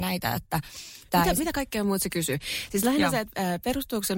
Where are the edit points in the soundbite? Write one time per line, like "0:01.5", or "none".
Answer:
none